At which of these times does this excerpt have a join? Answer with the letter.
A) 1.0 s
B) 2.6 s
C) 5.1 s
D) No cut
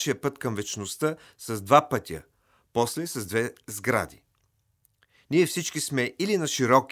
D